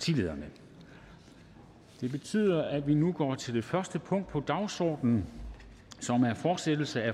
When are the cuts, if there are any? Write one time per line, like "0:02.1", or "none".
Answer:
none